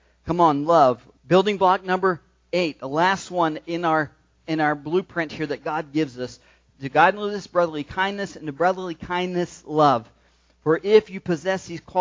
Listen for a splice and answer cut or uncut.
cut